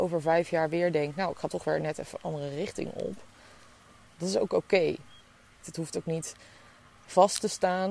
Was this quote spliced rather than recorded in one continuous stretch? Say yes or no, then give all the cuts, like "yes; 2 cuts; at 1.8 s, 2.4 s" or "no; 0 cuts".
yes; 1 cut; at 5.6 s